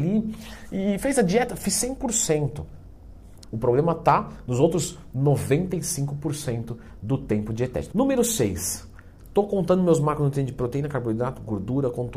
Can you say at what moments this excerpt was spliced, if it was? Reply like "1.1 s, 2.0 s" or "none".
3.4 s, 7.9 s